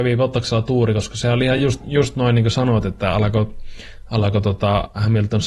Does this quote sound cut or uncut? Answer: uncut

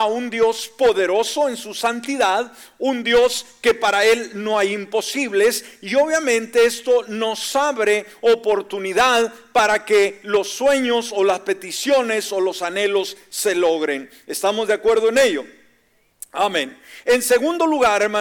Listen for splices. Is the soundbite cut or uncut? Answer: uncut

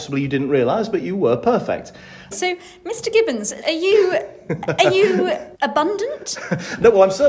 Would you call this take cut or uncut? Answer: cut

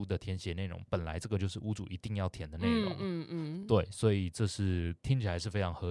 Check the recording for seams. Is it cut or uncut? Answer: uncut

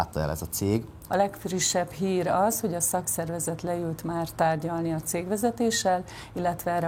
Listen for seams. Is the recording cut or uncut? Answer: cut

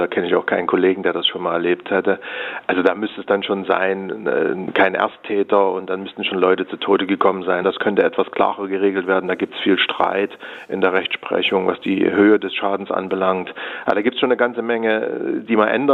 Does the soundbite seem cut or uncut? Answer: cut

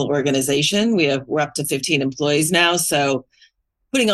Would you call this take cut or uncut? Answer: uncut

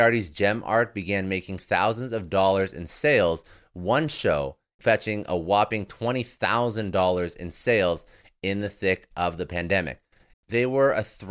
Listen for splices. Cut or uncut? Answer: cut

